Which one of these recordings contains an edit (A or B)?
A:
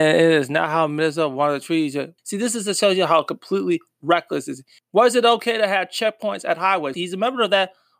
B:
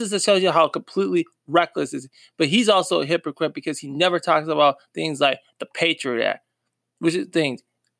A